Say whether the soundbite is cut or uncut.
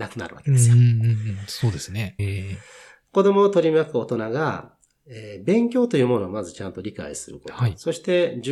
cut